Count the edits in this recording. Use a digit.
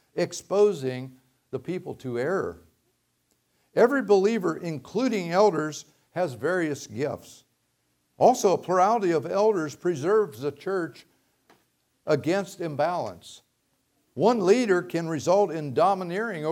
1